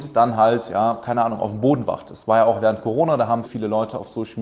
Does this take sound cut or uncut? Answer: cut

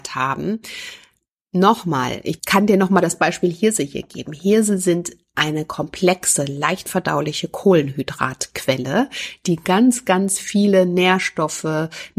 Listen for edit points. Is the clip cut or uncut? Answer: uncut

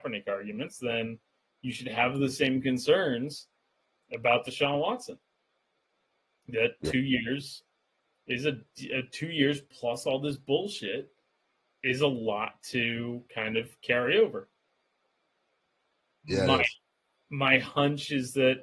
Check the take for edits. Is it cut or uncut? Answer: uncut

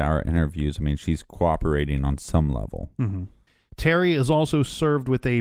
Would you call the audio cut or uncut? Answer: uncut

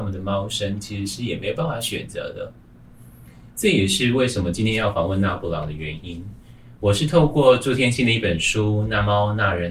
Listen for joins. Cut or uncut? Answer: uncut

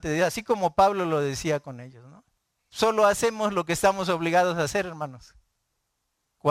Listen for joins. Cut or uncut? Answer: cut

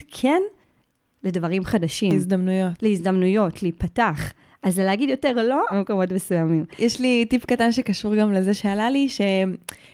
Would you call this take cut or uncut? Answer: cut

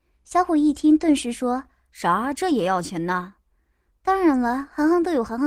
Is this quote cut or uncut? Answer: uncut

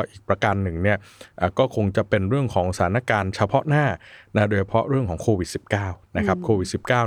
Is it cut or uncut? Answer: uncut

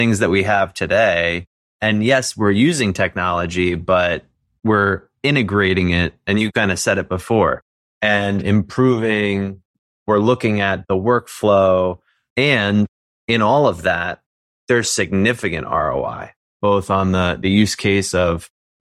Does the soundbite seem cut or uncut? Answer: uncut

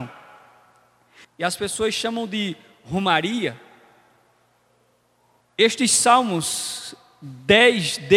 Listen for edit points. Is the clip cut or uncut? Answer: cut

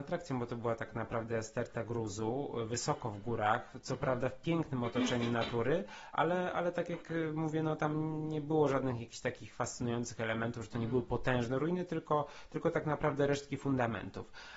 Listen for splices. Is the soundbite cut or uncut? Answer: uncut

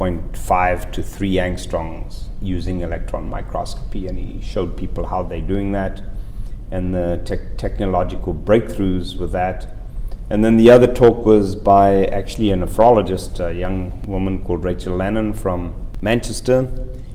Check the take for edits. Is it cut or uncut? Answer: uncut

